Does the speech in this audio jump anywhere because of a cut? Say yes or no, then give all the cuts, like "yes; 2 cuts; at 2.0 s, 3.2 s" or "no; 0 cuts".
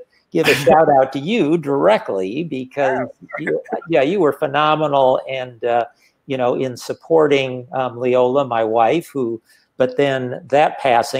yes; 1 cut; at 9.7 s